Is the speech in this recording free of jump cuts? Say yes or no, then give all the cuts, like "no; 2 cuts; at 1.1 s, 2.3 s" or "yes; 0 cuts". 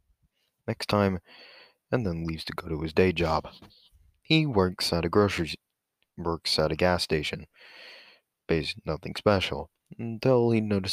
yes; 0 cuts